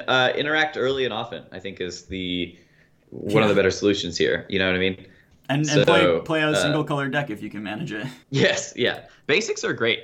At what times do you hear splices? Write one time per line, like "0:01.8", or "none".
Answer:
0:08.2

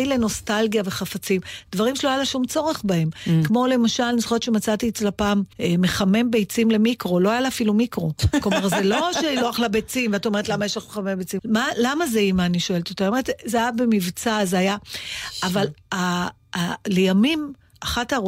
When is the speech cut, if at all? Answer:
0:05.5
0:11.4

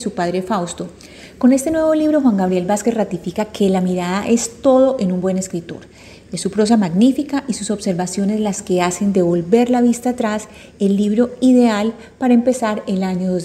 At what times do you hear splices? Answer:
none

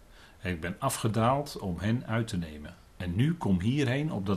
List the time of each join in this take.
none

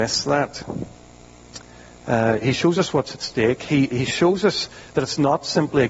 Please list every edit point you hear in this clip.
none

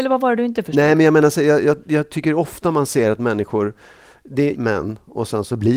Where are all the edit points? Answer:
0:01.8
0:04.5

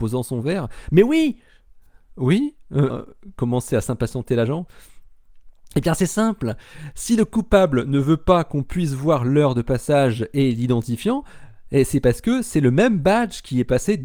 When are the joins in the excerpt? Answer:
0:02.9

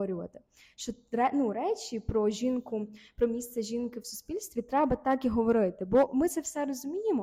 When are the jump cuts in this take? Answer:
none

